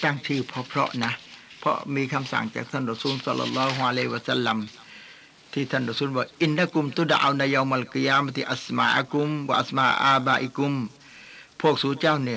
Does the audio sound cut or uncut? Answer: uncut